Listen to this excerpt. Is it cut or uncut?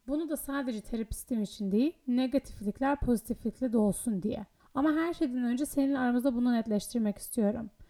cut